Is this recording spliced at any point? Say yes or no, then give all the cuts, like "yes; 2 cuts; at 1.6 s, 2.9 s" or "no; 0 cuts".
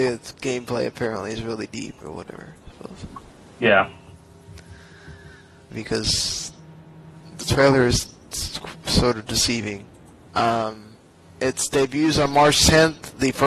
yes; 2 cuts; at 5.7 s, 10.3 s